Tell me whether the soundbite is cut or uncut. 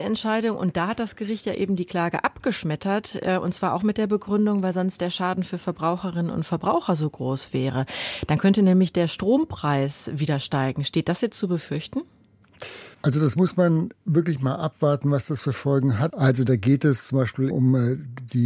cut